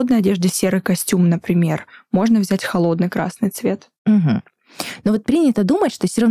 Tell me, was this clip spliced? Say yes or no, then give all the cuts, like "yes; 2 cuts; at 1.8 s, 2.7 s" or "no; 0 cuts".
no; 0 cuts